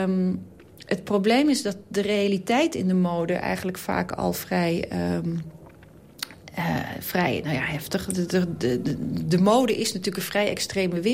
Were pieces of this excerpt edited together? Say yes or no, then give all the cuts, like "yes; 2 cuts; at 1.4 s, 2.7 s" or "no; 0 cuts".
no; 0 cuts